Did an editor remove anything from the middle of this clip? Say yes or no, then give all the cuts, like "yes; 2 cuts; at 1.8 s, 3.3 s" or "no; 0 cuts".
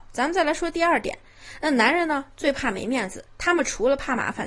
no; 0 cuts